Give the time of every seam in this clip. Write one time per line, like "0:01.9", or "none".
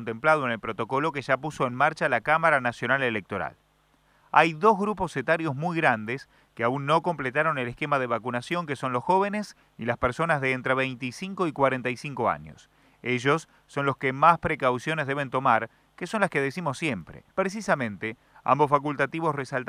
0:17.3